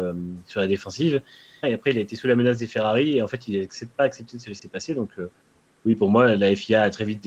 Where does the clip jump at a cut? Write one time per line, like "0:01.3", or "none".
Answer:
0:01.6